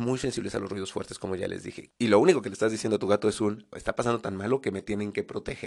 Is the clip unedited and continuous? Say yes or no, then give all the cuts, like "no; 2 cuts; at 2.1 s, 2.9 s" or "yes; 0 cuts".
no; 2 cuts; at 1.9 s, 3.7 s